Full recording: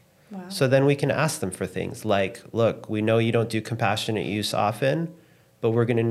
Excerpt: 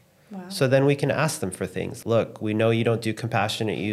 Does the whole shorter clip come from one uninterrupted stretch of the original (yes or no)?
no